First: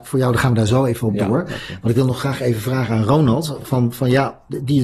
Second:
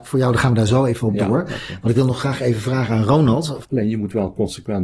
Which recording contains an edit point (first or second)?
second